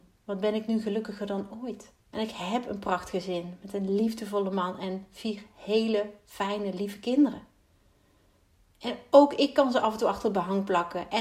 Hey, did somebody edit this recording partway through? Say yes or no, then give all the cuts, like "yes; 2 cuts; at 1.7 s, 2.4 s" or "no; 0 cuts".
yes; 1 cut; at 2.0 s